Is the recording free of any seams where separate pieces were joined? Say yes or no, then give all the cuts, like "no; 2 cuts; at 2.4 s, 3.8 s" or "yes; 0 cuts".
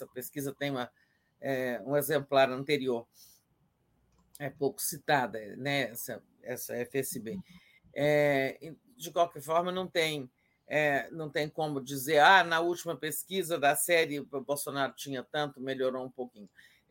yes; 0 cuts